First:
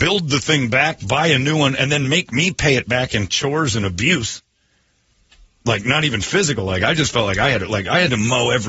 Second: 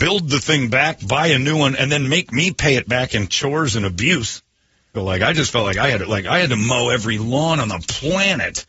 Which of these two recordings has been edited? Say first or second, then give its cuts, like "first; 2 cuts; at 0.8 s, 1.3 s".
second; 1 cut; at 5.0 s